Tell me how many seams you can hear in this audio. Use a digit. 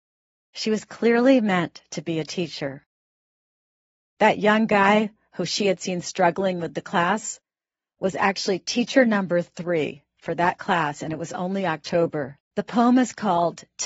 2